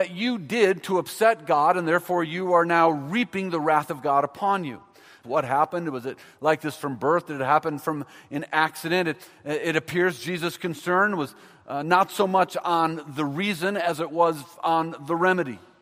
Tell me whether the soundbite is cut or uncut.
cut